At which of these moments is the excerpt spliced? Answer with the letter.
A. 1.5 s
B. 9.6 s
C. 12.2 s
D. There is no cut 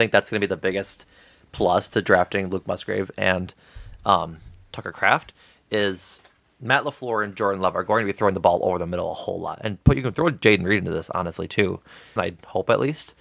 C